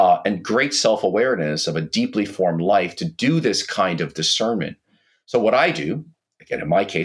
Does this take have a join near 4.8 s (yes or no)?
no